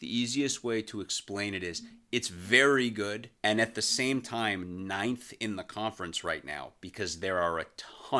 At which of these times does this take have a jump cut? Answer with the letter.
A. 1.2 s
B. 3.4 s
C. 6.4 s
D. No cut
B